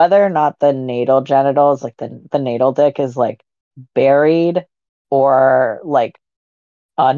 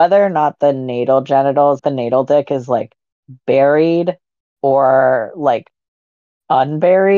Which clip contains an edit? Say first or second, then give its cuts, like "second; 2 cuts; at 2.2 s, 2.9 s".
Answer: second; 1 cut; at 1.8 s